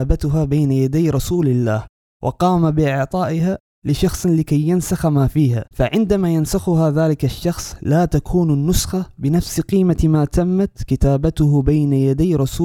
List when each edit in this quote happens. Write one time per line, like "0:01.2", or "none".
0:05.7